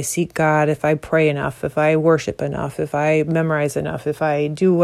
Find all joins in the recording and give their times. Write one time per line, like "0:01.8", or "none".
none